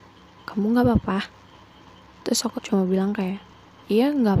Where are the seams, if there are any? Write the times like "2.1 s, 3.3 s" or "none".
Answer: 2.6 s